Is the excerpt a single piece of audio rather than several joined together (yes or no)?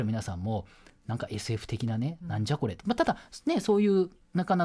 yes